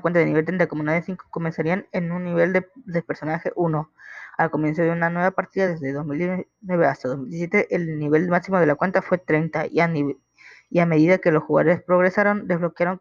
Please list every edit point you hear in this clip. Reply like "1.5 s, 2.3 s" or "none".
none